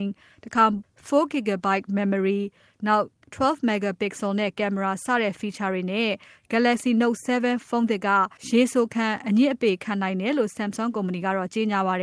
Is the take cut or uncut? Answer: cut